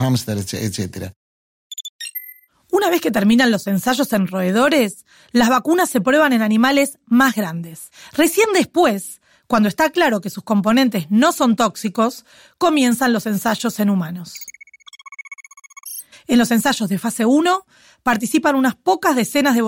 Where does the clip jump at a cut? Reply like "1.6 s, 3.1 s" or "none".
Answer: 16.1 s